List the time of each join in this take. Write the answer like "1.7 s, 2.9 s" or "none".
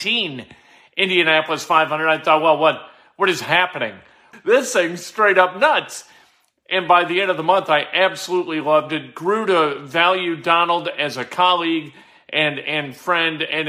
4.3 s

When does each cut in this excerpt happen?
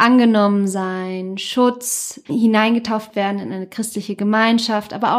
2.2 s

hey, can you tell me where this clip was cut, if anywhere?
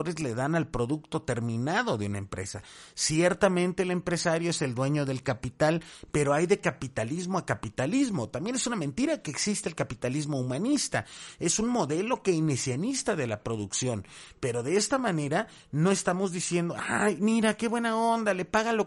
none

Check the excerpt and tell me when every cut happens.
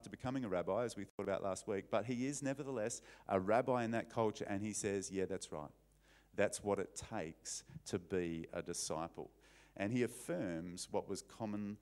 none

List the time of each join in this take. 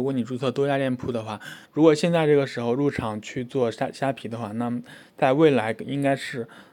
1.6 s

